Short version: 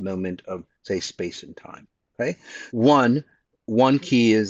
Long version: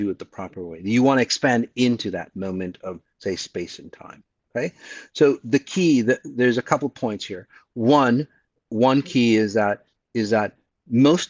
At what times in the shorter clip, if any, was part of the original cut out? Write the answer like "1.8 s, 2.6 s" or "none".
2.7 s